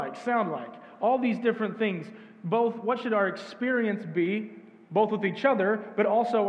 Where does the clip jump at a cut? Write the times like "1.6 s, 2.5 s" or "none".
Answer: none